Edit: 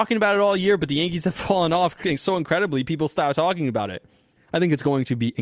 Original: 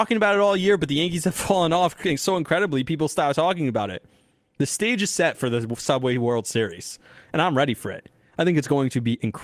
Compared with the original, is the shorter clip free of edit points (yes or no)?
no